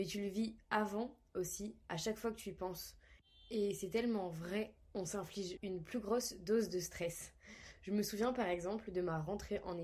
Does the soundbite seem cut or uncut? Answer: cut